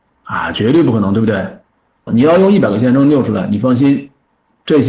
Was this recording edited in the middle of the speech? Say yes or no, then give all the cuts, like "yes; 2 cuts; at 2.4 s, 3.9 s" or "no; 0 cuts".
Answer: yes; 1 cut; at 2.1 s